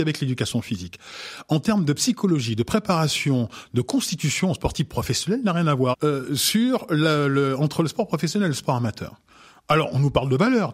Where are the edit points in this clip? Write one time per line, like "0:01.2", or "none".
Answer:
0:05.9